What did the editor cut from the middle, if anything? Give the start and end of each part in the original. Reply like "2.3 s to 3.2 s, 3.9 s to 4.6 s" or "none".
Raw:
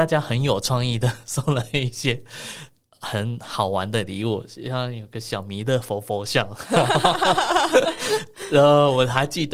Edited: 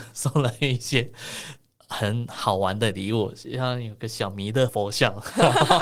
5.8 s to 6.0 s